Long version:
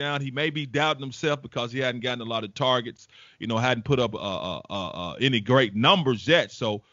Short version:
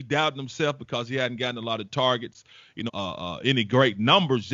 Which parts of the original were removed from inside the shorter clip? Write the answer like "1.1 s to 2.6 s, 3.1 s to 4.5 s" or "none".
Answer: 3.5 s to 4.6 s